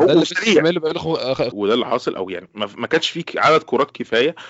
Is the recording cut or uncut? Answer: cut